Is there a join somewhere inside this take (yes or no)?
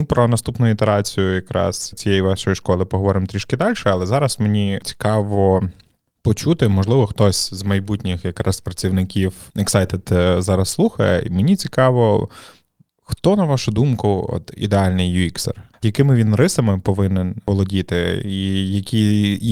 no